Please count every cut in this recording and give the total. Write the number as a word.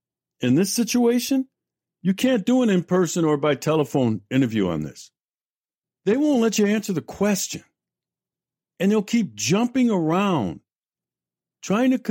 one